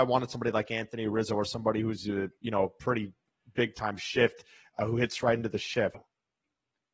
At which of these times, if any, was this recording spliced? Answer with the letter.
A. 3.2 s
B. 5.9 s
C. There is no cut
B